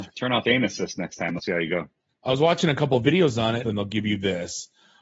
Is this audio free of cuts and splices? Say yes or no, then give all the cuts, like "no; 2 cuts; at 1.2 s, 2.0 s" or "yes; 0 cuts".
no; 2 cuts; at 2.1 s, 3.6 s